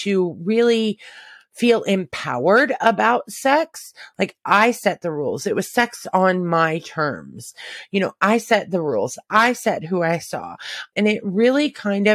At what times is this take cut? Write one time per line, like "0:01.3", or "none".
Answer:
0:09.2
0:10.9